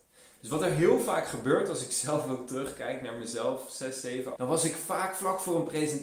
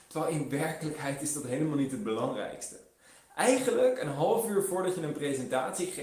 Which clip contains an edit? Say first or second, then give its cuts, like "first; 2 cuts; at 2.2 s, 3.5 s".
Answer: first; 1 cut; at 4.4 s